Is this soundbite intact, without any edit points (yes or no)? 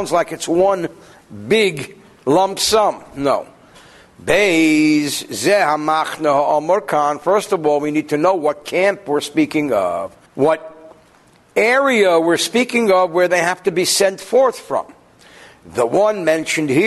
no